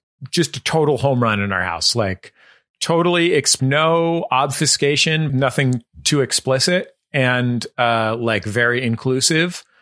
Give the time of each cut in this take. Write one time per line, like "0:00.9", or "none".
0:03.6
0:05.3